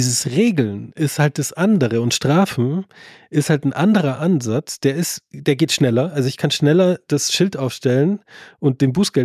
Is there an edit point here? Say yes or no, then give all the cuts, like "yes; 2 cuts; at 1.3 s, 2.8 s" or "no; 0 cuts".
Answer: no; 0 cuts